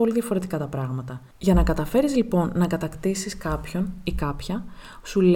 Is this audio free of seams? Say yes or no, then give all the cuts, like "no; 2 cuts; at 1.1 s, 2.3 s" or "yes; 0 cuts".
yes; 0 cuts